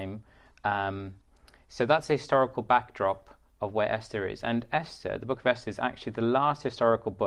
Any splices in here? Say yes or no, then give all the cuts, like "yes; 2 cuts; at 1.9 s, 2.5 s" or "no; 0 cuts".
no; 0 cuts